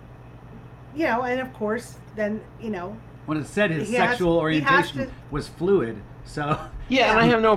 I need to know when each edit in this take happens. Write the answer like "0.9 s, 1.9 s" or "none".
none